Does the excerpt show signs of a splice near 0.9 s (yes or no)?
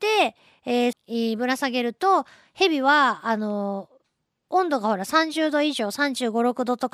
yes